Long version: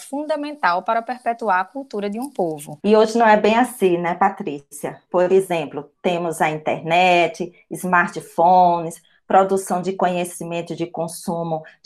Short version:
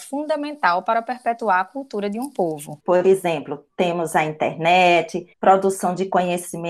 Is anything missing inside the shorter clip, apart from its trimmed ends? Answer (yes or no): yes